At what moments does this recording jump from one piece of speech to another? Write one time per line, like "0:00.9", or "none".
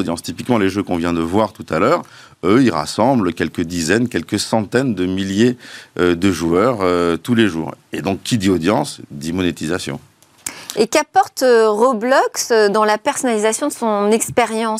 none